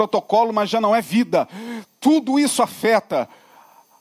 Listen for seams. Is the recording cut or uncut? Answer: uncut